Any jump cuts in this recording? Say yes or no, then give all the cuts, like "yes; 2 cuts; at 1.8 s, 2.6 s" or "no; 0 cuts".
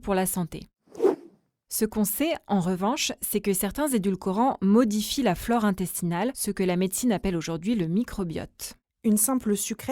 no; 0 cuts